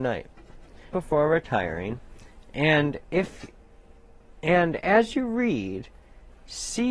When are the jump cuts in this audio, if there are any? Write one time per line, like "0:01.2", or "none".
0:00.9